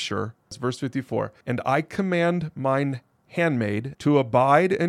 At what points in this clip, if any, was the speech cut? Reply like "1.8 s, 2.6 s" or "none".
1.4 s, 3.9 s